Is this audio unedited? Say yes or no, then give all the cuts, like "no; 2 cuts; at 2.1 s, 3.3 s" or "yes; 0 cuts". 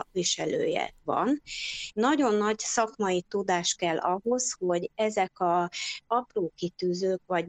no; 1 cut; at 1.9 s